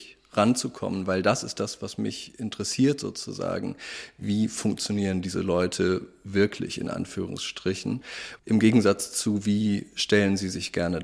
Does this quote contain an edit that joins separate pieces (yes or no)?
no